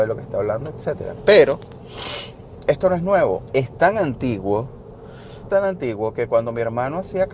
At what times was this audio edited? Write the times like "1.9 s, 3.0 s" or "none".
3.5 s, 5.5 s

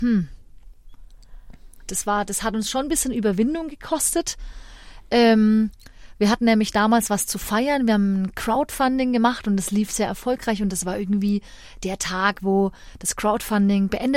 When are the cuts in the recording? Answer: 1.9 s

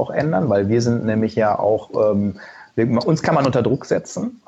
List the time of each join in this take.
none

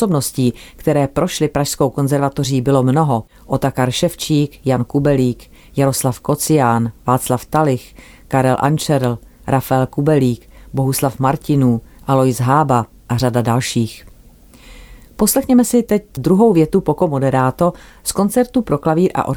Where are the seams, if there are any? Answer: none

